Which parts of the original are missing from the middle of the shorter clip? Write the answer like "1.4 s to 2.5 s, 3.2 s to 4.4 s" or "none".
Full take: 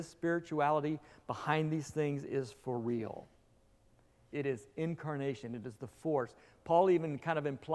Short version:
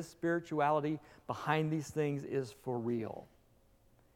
none